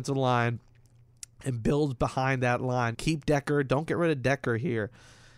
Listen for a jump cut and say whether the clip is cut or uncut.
cut